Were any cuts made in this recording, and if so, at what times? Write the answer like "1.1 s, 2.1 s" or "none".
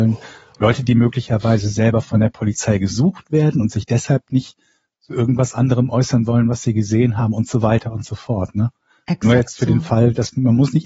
none